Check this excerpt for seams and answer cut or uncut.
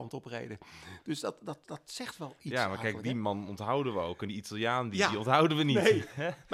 uncut